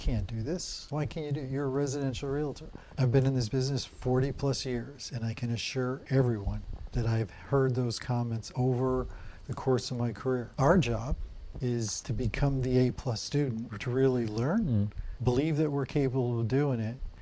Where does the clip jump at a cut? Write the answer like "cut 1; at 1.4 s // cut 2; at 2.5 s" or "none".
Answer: none